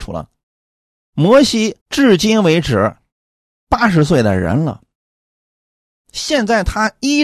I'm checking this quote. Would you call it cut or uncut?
cut